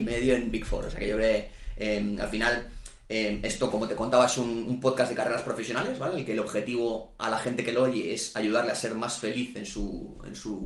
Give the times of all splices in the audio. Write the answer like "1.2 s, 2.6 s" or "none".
3.7 s